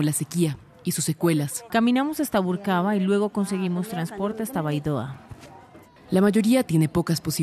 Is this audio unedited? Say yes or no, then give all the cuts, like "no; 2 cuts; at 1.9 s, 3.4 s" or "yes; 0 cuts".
no; 2 cuts; at 1.7 s, 6.0 s